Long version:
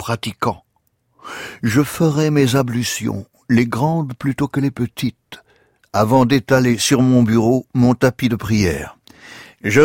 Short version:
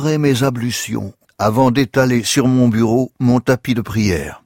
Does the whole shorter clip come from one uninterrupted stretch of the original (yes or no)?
no